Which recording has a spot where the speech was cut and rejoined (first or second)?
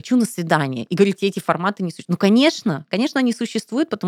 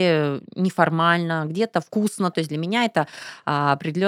second